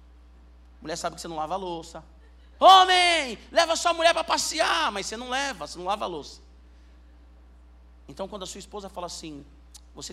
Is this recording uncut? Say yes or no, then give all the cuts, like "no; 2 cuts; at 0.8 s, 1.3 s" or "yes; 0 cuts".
no; 1 cut; at 2.6 s